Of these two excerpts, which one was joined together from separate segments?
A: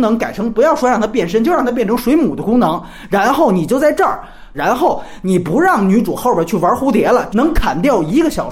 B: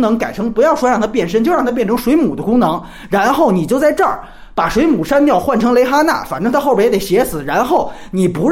A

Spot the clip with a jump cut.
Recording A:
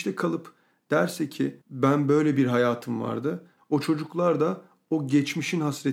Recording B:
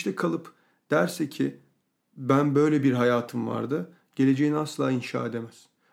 A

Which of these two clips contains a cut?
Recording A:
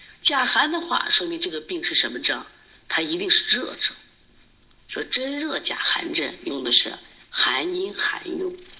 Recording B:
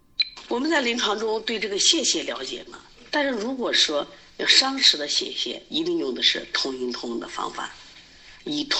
B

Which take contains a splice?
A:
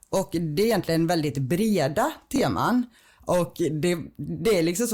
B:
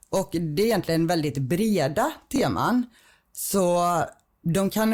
A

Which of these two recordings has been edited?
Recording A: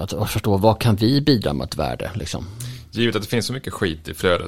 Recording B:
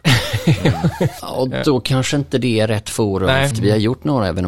B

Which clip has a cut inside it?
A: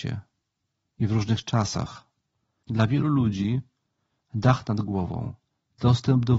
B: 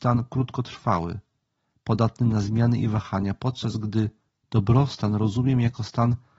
A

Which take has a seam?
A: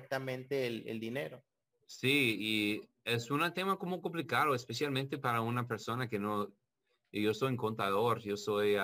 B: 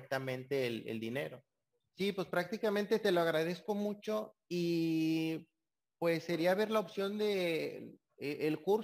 B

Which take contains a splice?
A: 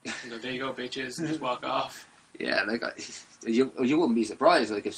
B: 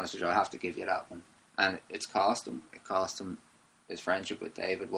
B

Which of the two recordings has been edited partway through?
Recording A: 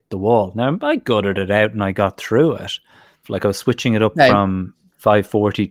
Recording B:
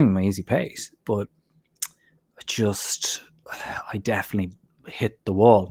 A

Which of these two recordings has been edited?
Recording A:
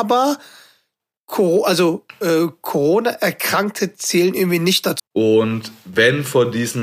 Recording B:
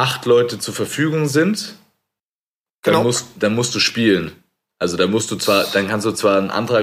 A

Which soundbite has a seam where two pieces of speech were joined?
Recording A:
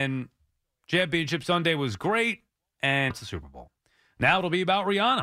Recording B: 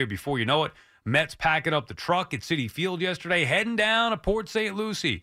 A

